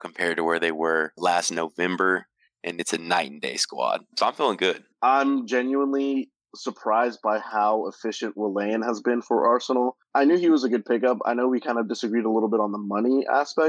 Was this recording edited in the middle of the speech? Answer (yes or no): yes